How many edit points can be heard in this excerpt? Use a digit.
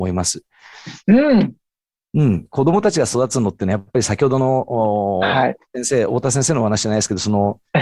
1